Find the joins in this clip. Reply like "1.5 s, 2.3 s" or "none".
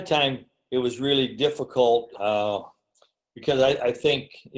2.1 s